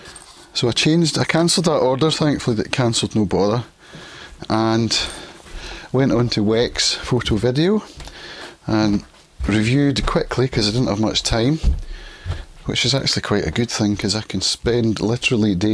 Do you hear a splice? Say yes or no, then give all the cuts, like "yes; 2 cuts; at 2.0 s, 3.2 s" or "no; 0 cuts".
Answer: no; 0 cuts